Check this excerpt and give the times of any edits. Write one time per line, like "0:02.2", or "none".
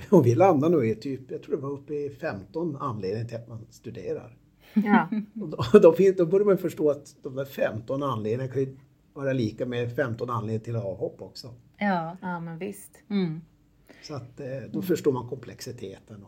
none